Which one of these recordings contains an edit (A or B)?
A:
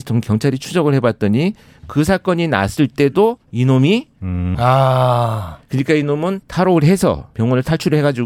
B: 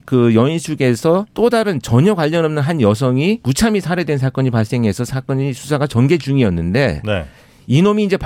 A